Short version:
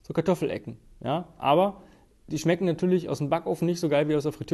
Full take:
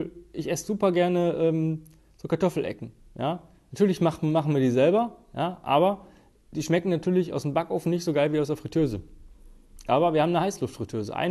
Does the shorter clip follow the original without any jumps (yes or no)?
no